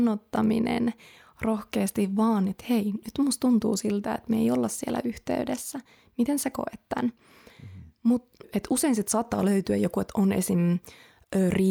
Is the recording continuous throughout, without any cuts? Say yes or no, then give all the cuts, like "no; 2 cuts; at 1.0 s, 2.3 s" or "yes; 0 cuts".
no; 1 cut; at 8.4 s